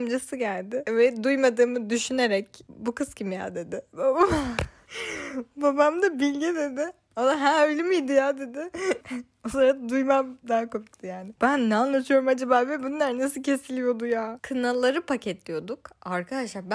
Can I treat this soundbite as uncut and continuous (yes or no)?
no